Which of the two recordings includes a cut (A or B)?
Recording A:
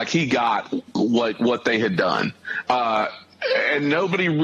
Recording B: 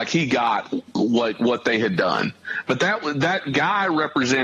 A